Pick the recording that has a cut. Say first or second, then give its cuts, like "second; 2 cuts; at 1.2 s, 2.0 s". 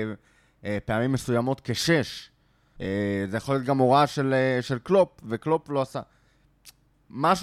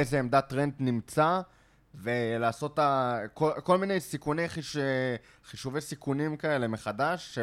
first; 1 cut; at 2.8 s